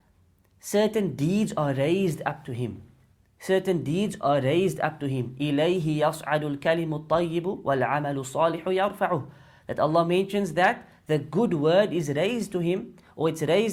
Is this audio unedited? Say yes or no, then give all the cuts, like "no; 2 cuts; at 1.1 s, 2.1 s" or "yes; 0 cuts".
yes; 0 cuts